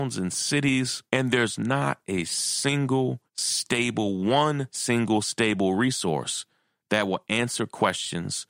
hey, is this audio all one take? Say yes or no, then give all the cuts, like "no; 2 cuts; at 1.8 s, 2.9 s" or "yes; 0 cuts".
no; 2 cuts; at 1.1 s, 3.3 s